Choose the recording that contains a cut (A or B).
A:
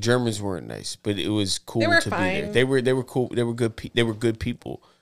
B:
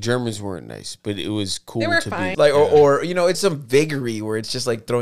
B